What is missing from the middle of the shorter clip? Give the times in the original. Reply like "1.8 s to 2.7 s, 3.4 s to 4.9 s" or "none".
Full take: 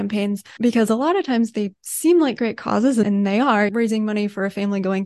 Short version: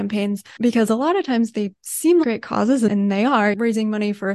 2.2 s to 2.4 s